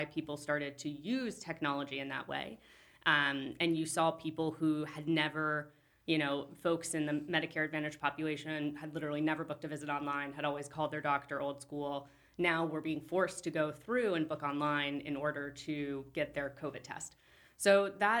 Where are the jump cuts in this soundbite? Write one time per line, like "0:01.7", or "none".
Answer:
none